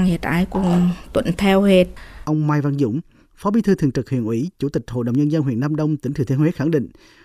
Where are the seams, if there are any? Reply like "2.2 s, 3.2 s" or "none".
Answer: 2.2 s